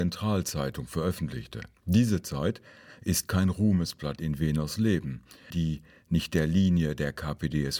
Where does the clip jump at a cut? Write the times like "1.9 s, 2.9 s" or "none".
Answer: 5.5 s